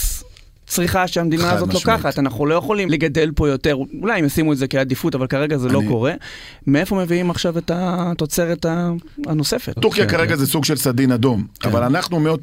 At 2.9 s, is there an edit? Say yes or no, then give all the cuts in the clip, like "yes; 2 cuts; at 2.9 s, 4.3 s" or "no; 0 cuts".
yes; 2 cuts; at 2.9 s, 9.8 s